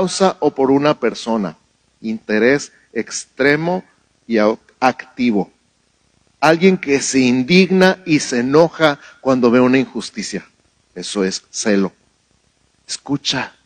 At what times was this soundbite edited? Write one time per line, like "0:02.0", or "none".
0:12.7